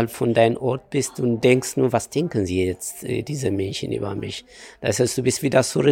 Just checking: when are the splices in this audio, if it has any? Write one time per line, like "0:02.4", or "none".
none